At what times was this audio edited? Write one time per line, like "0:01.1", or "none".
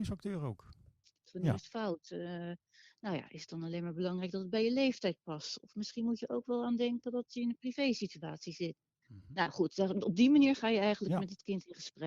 0:01.3